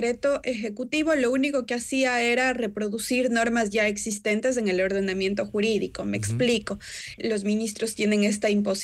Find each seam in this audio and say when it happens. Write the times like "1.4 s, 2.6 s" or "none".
7.2 s